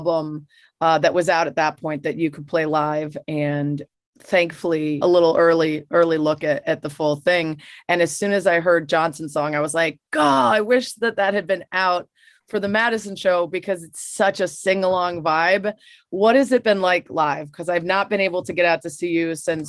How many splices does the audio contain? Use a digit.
1